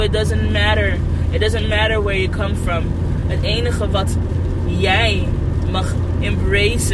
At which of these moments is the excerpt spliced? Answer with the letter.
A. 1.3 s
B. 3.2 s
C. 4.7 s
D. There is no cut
D